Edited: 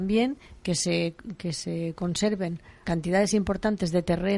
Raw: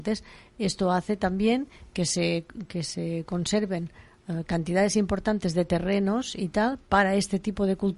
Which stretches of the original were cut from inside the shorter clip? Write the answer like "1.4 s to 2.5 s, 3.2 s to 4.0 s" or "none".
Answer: 4.1 s to 4.5 s

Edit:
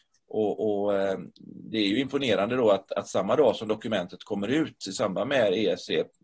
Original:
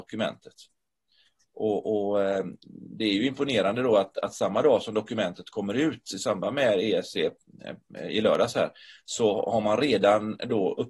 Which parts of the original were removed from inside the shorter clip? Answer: none

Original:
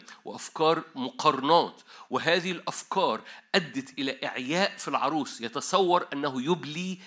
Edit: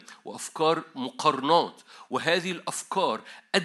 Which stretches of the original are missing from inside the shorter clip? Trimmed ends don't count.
none

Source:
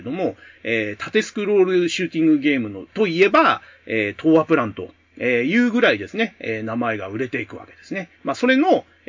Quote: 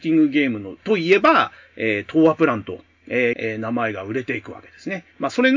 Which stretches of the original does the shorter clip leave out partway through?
5.4 s to 6.4 s

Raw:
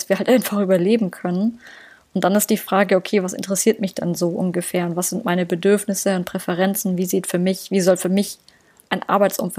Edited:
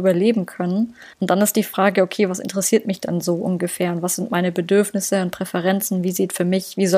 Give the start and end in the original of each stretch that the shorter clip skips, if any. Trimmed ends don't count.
1.8 s to 2.1 s

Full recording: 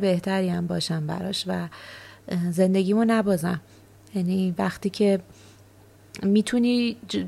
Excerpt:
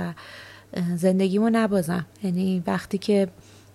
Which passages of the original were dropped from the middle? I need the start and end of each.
3.7 s to 4.0 s

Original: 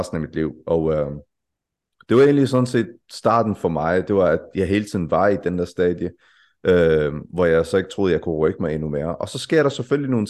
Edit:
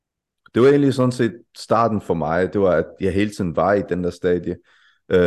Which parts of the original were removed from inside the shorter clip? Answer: none

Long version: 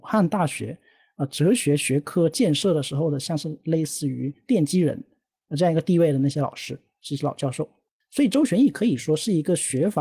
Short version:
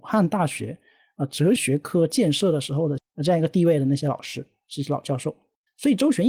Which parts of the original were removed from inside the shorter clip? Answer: 1.6 s to 1.8 s, 3.2 s to 5.3 s

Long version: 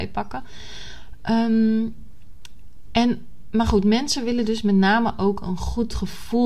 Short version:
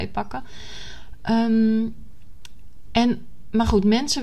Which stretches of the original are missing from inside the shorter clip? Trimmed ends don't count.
none

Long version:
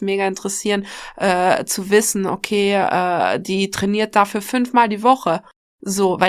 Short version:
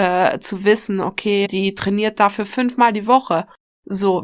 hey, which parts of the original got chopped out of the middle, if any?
2.7 s to 3.4 s

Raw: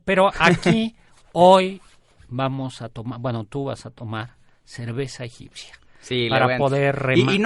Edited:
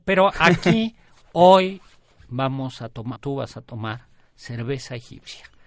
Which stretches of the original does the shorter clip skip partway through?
3.2 s to 3.4 s

